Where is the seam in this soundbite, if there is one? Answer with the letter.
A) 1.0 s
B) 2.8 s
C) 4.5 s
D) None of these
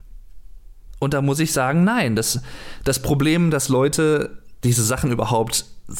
D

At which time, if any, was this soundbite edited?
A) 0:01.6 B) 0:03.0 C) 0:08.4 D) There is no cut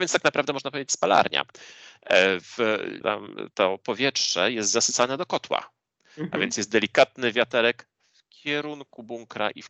B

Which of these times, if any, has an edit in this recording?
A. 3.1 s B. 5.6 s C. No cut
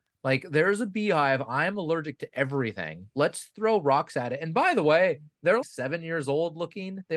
B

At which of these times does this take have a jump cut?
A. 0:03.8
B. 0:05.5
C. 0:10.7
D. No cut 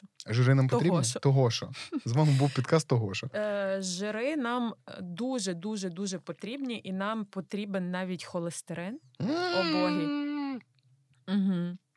D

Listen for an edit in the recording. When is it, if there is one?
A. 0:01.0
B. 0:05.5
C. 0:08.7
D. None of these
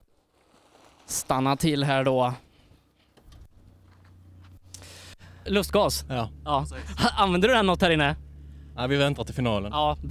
B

